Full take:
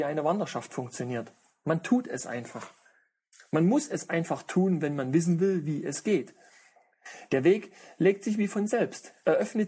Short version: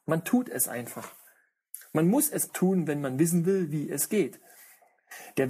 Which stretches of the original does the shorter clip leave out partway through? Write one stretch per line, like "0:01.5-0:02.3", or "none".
0:04.1-0:04.4